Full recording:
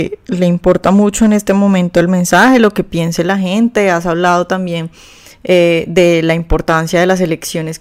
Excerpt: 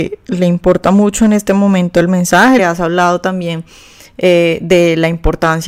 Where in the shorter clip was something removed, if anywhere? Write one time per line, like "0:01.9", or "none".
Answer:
0:02.6